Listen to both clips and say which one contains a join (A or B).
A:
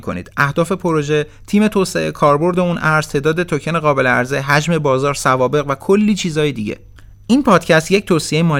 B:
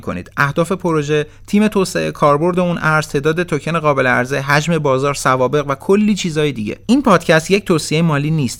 B